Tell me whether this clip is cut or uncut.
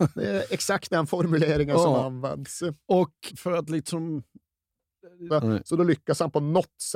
cut